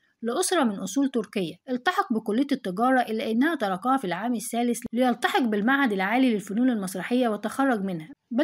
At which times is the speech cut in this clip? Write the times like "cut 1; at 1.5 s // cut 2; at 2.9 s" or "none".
cut 1; at 1.6 s